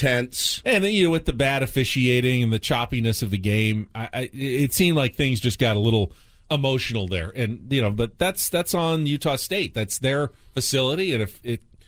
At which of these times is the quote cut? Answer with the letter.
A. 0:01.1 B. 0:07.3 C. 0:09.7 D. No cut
D